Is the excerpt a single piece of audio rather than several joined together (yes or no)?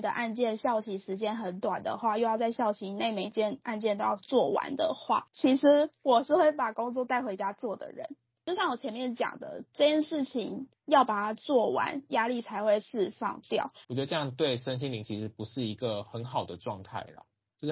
no